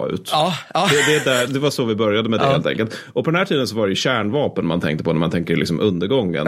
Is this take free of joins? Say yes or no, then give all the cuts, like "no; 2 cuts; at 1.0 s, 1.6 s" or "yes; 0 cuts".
no; 1 cut; at 1.5 s